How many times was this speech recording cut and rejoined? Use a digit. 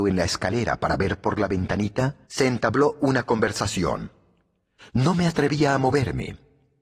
2